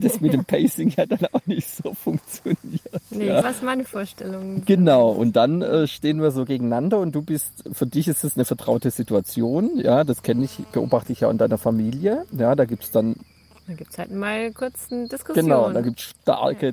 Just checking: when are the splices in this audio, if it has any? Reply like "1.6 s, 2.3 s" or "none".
3.4 s